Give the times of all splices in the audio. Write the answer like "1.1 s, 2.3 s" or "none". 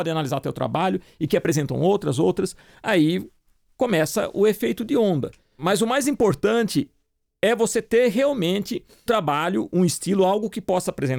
9.1 s